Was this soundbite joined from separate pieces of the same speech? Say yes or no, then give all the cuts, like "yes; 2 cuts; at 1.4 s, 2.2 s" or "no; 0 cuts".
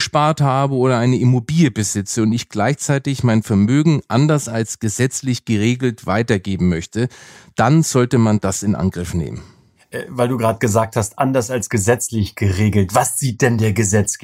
no; 0 cuts